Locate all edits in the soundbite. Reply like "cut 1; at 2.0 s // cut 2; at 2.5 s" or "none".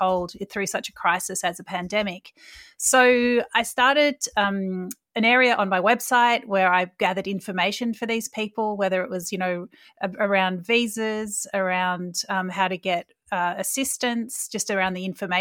none